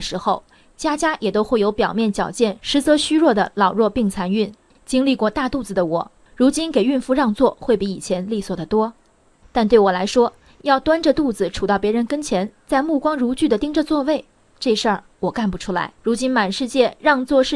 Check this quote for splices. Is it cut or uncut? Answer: cut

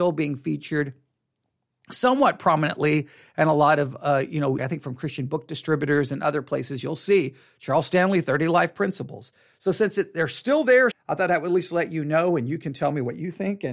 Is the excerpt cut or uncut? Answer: cut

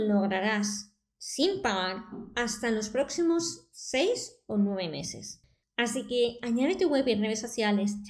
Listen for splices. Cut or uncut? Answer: cut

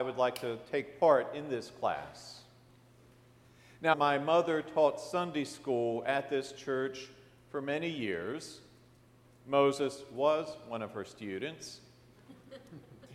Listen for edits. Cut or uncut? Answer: cut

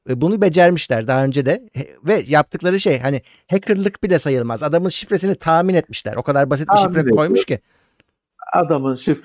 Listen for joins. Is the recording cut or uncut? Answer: uncut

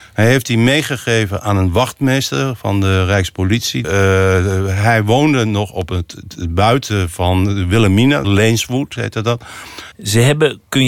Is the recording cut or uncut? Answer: cut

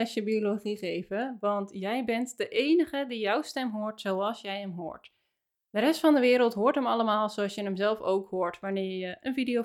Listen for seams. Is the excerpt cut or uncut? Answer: uncut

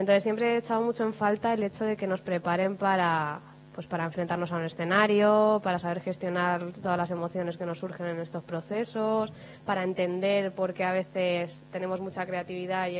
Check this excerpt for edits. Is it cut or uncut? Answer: uncut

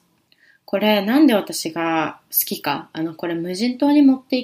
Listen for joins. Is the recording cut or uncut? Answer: uncut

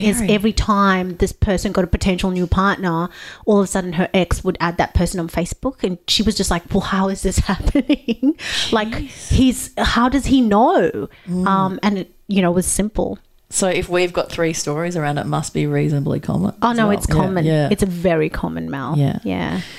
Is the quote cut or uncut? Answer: uncut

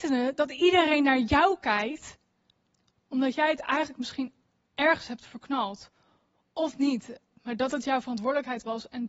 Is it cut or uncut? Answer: uncut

